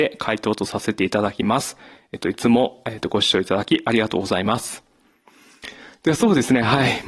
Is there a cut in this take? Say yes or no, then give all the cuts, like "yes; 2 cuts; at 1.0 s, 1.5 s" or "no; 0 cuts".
no; 0 cuts